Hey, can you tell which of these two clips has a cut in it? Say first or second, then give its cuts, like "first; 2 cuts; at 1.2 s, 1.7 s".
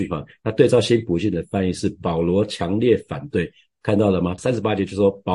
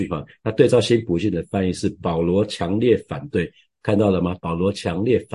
first; 1 cut; at 4.4 s